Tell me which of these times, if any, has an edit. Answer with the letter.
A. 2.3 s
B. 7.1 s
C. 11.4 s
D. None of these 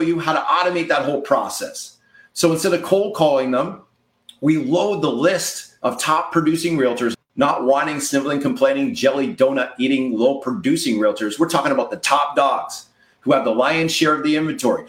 B